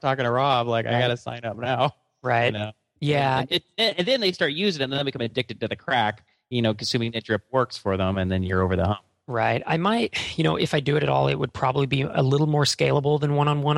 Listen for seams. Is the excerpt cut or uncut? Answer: uncut